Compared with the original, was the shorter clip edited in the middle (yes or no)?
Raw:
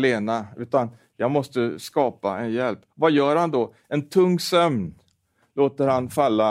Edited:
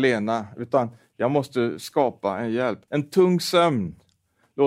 yes